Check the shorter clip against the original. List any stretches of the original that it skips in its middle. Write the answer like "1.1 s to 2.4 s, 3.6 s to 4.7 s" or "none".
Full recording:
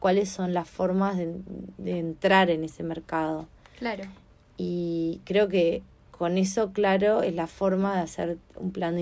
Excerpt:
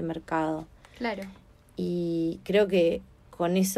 none